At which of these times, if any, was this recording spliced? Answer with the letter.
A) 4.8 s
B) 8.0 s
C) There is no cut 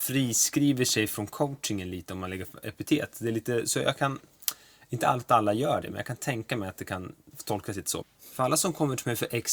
B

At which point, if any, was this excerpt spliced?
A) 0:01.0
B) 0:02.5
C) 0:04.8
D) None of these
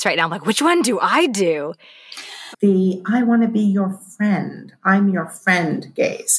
B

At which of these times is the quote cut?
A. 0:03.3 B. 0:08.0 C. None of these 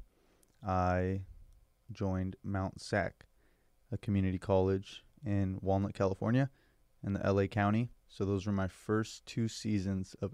B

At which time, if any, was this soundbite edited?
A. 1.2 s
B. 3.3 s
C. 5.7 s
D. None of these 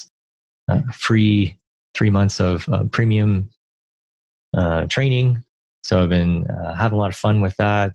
D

